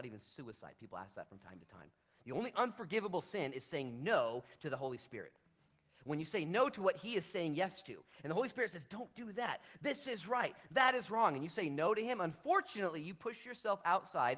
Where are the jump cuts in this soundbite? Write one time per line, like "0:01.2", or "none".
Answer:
none